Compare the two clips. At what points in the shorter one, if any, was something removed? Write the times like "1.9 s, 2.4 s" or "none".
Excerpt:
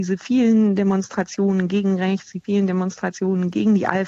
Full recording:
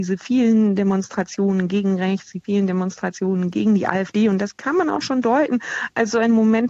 none